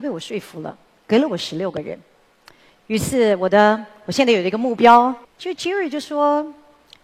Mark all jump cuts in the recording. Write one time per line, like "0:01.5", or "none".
0:05.2